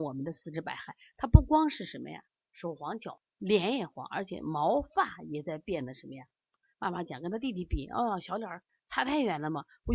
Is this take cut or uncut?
uncut